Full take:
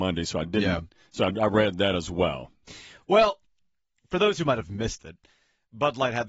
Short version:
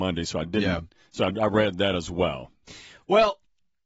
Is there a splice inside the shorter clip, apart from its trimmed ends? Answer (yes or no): no